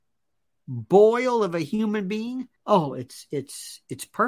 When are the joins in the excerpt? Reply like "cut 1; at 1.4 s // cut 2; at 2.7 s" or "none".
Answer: cut 1; at 2.6 s